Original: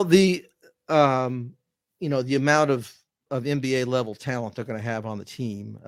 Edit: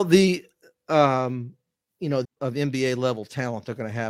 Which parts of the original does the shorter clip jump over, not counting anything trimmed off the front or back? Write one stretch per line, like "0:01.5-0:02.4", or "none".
0:02.2-0:03.1

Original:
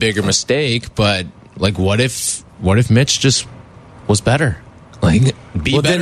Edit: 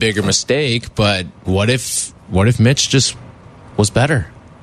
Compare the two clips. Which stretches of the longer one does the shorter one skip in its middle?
0:01.4-0:01.8

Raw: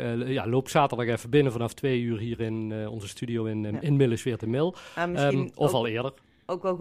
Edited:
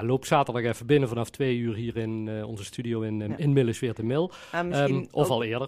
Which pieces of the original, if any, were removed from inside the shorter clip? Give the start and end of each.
none

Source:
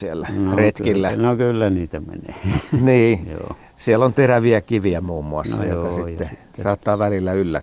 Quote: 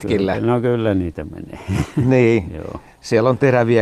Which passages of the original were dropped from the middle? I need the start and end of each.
none

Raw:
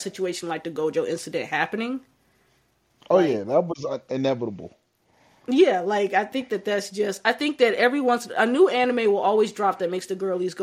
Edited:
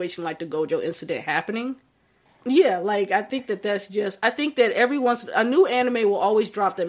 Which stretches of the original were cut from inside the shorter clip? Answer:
0:02.5-0:05.3

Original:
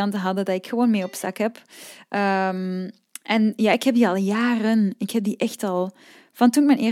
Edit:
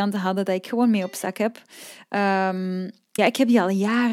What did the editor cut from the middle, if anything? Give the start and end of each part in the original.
0:03.2-0:03.6

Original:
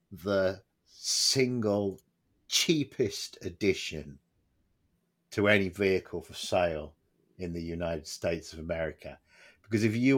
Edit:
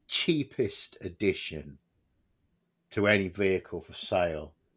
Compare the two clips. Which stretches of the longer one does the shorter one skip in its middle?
none

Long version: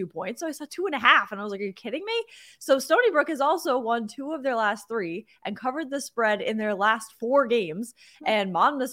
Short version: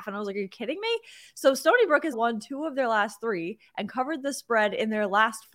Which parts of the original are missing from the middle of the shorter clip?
0:03.4-0:03.8

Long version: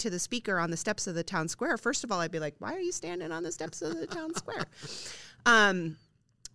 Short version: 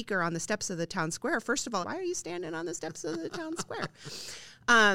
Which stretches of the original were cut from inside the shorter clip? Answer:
0:02.2-0:02.6

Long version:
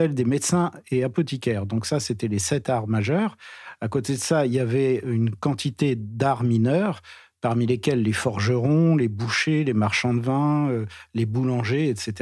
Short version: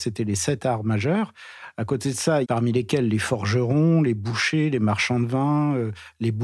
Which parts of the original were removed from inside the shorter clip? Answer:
0:04.5-0:07.4

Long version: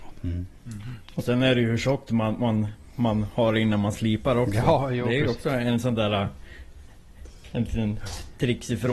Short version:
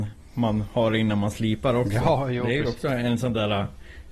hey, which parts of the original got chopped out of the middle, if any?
none

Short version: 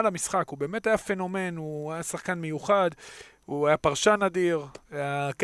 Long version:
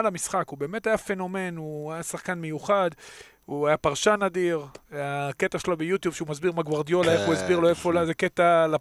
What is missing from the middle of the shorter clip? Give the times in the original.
none

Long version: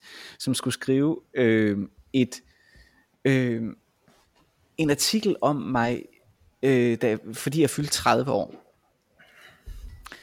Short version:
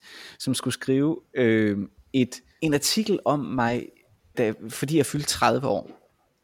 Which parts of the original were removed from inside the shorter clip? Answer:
0:02.6-0:04.8
0:06.5-0:07.0

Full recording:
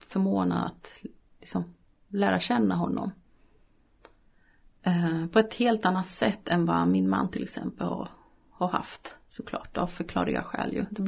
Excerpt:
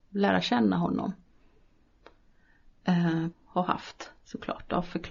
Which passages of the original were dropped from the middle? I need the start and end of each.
0:05.3-0:08.4

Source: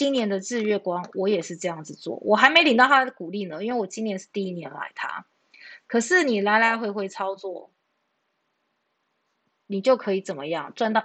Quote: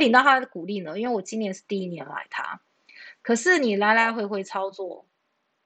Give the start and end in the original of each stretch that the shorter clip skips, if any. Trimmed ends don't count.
none

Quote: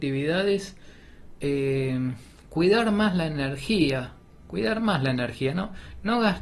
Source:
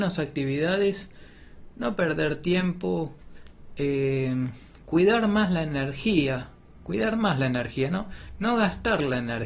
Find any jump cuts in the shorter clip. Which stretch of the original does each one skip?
0:01.7-0:03.7

